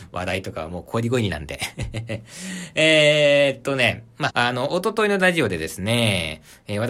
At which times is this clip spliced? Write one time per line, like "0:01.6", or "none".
0:04.3